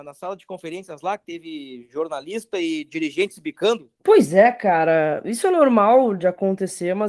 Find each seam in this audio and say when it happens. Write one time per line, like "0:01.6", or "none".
0:03.9
0:06.2